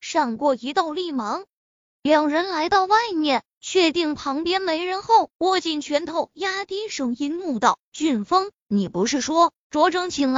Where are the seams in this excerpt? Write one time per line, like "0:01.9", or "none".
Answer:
0:05.3